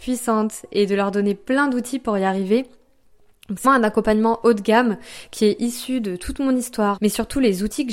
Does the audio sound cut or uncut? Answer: cut